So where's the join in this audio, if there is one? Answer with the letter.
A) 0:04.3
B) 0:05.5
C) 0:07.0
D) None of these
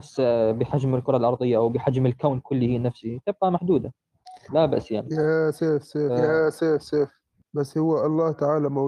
D